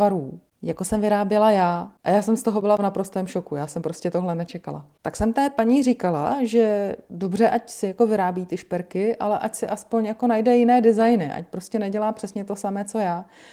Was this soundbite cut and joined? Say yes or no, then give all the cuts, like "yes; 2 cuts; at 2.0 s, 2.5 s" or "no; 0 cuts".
no; 0 cuts